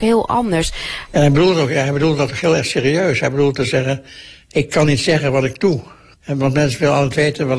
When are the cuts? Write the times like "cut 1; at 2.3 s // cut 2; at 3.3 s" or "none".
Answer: cut 1; at 1.1 s